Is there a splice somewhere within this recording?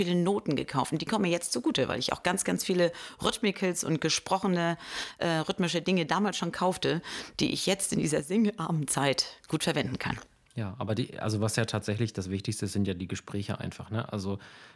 no; 0 cuts

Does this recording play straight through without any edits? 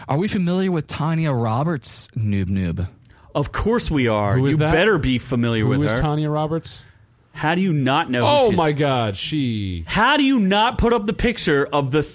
yes; 0 cuts

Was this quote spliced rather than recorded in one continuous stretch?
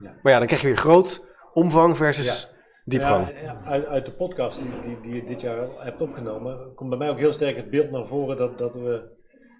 yes; 1 cut; at 3.3 s

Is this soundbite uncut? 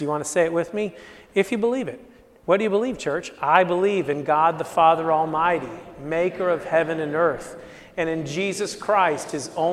yes; 0 cuts

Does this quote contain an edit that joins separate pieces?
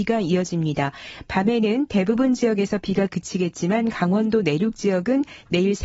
no; 0 cuts

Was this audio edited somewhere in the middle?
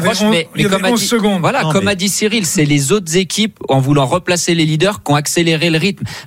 no; 0 cuts

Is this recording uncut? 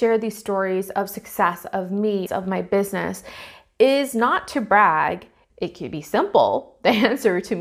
no; 2 cuts; at 2.3 s, 5.5 s

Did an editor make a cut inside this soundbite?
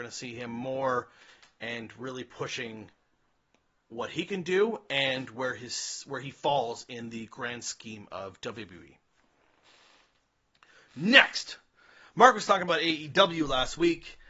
no; 0 cuts

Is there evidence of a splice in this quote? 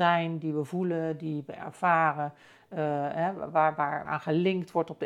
yes; 1 cut; at 4.1 s

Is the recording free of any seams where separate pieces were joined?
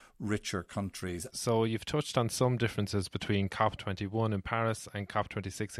no; 1 cut; at 1.3 s

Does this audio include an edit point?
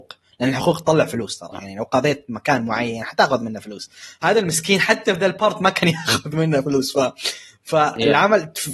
no; 0 cuts

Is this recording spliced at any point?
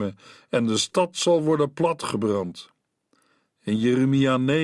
no; 0 cuts

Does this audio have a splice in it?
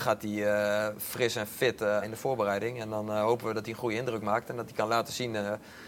yes; 1 cut; at 2.0 s

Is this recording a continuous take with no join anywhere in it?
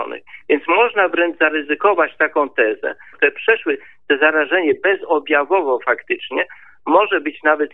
no; 1 cut; at 3.1 s

